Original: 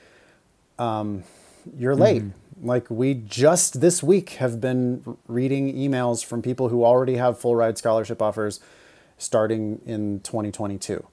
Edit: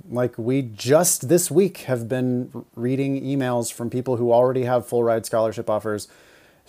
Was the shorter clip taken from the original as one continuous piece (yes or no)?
yes